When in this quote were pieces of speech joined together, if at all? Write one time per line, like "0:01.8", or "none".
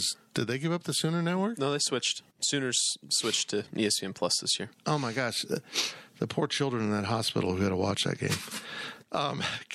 0:02.3
0:04.7